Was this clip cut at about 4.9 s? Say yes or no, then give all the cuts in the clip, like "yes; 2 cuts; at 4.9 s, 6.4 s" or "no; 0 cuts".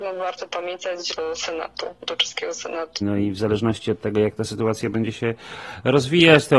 no; 2 cuts; at 1.1 s, 3.0 s